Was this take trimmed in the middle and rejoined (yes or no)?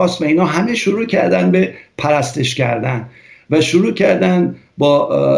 no